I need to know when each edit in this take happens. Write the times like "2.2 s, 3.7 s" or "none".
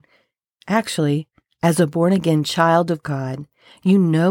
none

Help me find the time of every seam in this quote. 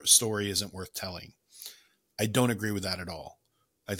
none

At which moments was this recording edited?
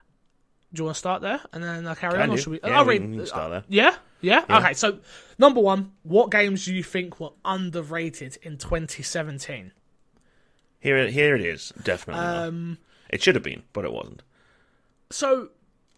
11.7 s

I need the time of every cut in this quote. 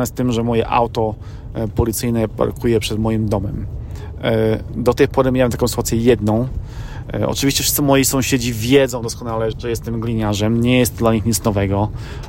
9.5 s

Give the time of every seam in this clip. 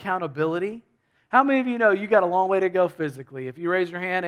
1.1 s

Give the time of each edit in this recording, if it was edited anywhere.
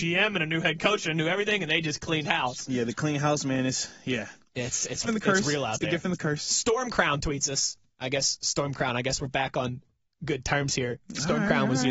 5.0 s

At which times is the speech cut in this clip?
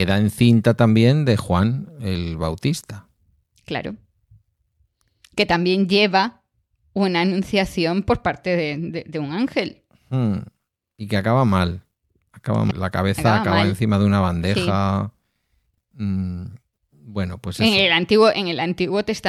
12.7 s, 15.8 s

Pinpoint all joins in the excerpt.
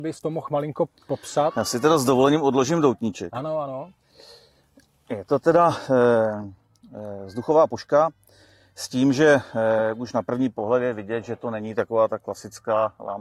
none

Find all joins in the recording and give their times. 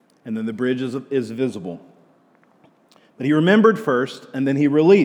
none

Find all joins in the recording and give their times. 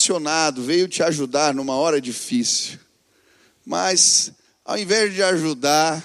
none

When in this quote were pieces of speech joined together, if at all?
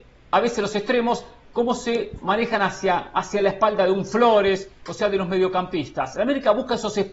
4.9 s

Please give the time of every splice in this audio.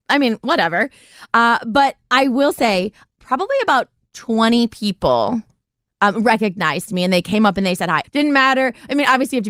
3.1 s, 8.0 s

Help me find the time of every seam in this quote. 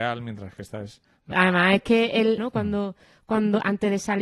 1.3 s, 2.4 s

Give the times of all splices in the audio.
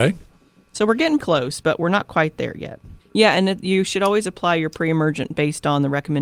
1.2 s, 3.0 s

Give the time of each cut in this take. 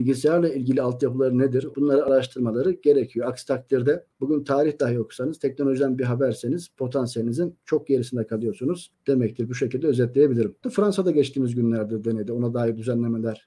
1.7 s, 10.6 s

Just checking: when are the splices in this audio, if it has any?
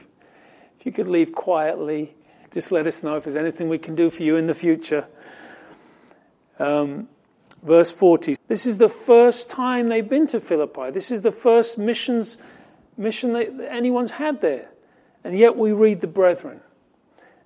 2.4 s, 8.4 s

